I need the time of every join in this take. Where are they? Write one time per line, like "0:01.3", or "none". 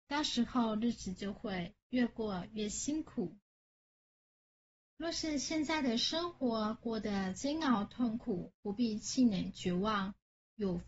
none